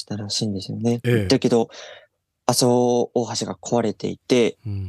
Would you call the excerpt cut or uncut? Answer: uncut